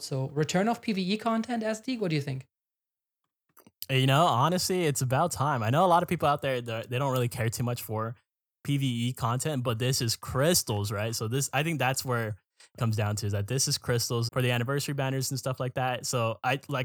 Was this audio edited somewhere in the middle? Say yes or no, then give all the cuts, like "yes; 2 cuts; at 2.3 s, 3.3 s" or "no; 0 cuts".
yes; 2 cuts; at 12.8 s, 14.3 s